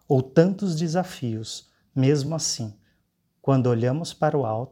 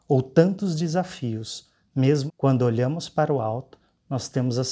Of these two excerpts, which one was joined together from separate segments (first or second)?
second